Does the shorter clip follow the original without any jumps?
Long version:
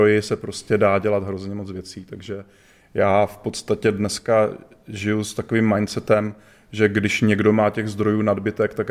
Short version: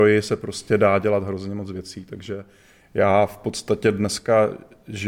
yes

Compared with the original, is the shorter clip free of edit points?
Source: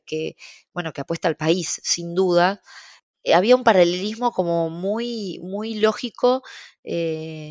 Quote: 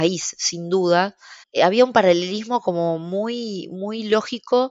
no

